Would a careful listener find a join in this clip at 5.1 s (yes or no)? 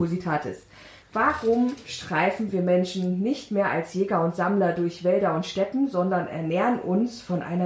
no